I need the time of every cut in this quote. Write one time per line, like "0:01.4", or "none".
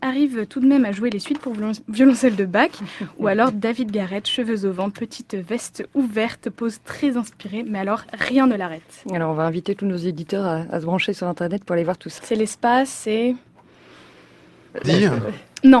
0:12.2
0:14.8